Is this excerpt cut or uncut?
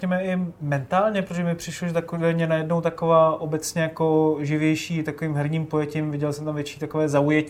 uncut